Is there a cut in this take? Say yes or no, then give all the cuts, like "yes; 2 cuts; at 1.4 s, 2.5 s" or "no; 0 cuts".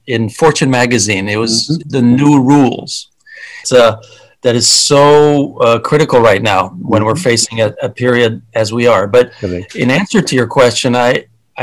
yes; 2 cuts; at 1.8 s, 3.6 s